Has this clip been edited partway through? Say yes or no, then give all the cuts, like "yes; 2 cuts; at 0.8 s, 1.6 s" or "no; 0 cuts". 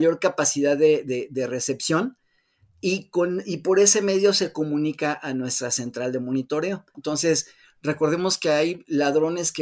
yes; 1 cut; at 6.9 s